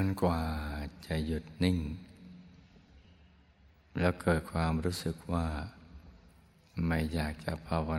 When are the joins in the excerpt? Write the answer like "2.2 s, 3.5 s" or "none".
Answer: 1.1 s